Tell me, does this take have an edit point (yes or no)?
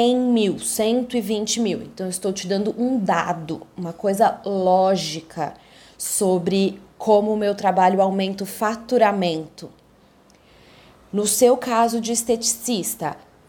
no